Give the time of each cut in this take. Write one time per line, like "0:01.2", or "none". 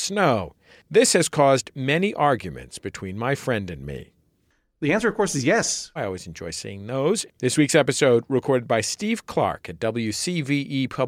0:06.0
0:07.3